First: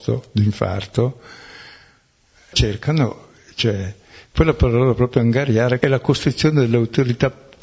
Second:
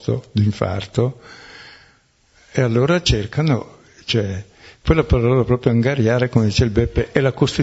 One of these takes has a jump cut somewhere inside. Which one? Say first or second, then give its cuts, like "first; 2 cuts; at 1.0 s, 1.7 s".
first; 2 cuts; at 2.5 s, 5.8 s